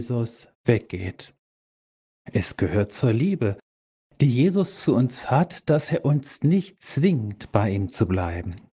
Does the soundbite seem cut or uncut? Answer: uncut